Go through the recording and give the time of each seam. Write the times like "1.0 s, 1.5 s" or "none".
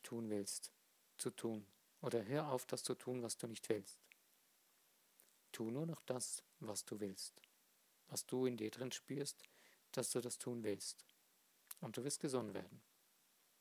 none